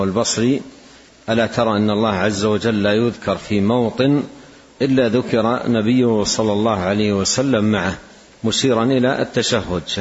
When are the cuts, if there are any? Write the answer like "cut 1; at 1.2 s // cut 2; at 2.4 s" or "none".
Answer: none